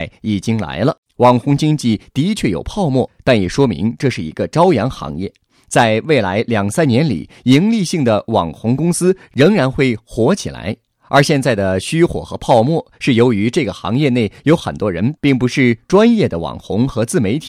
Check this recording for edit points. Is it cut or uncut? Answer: cut